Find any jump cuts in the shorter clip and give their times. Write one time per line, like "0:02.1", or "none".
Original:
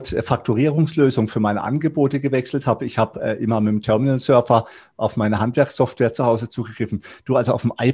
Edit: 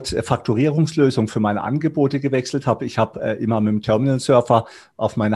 none

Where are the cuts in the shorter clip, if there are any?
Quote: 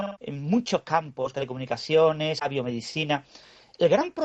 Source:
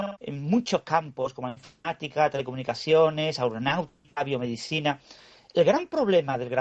0:01.3
0:02.4

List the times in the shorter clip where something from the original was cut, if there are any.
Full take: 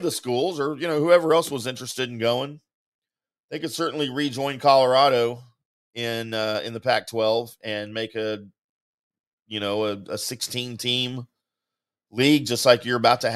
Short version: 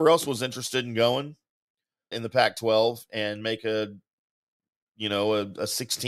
0:02.1

